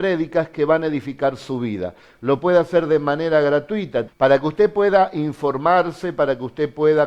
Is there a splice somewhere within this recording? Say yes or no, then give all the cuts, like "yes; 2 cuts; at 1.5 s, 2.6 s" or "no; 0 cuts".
yes; 1 cut; at 4.1 s